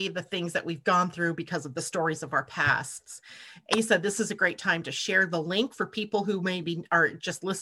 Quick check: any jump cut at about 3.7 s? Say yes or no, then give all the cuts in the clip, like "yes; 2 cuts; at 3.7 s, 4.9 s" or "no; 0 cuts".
yes; 1 cut; at 3.7 s